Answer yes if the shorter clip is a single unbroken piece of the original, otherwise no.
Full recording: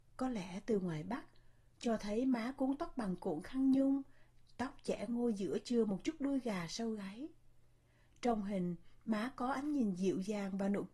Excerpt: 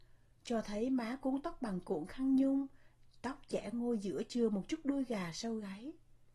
yes